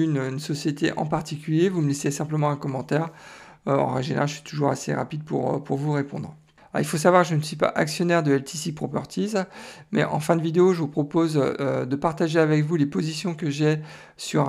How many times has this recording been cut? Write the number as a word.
zero